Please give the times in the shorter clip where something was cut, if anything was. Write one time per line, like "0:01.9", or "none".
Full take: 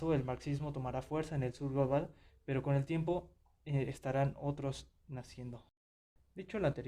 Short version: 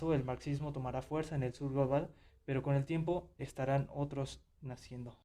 0:03.4